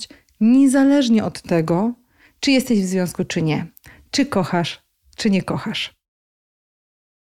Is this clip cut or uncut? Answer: uncut